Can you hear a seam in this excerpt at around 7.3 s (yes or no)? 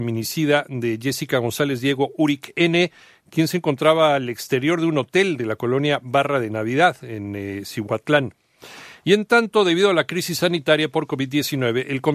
no